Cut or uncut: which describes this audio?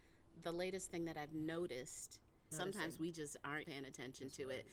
cut